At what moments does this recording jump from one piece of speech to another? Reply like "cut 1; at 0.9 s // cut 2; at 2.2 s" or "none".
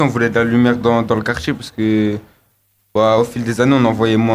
none